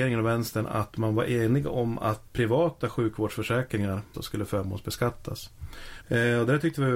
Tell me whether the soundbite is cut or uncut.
cut